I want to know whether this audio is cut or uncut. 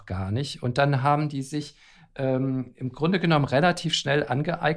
uncut